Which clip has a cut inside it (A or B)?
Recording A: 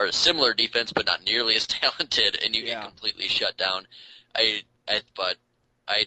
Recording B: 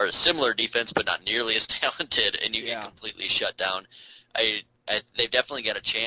A